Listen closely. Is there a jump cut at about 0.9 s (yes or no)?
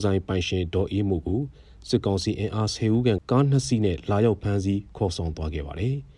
no